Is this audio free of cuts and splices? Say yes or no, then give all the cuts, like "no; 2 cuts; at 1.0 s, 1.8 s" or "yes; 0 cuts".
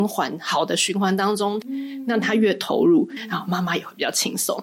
no; 2 cuts; at 1.6 s, 3.2 s